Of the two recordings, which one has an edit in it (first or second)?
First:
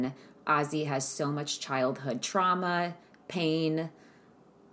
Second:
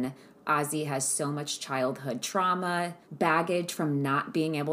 second